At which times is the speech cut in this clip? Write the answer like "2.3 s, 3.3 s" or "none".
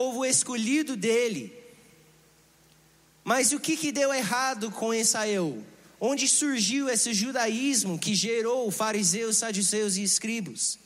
none